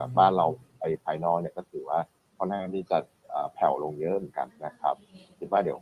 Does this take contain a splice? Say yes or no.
yes